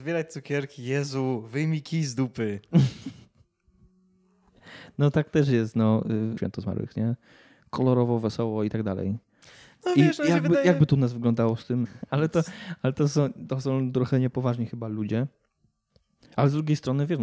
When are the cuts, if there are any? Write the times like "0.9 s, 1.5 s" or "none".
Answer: 6.4 s, 11.9 s